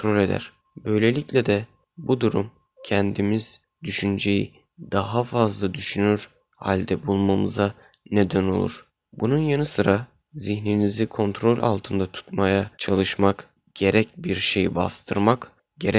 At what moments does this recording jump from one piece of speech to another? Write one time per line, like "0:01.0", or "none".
0:09.0
0:12.7